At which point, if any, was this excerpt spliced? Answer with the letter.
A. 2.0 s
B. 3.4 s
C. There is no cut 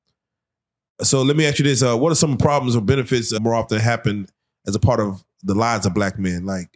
B